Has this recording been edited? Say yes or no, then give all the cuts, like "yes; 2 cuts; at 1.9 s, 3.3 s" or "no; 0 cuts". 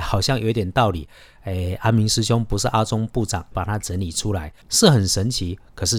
yes; 2 cuts; at 3.5 s, 4.6 s